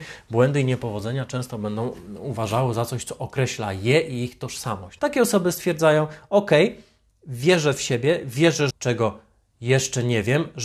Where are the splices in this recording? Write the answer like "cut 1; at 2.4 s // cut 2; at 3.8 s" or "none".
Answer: cut 1; at 5.0 s // cut 2; at 8.7 s